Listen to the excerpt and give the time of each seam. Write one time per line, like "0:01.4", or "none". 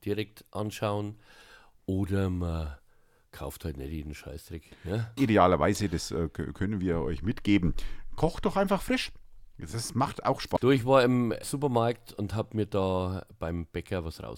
0:05.2
0:10.6